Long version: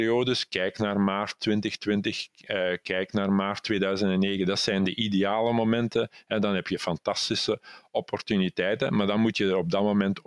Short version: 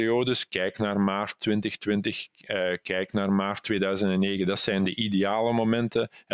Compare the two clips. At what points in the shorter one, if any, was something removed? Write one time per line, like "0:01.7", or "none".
none